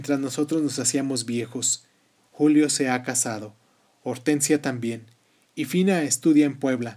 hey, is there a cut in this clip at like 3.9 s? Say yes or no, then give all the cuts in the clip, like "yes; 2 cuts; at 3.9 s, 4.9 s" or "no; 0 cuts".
no; 1 cut; at 2.2 s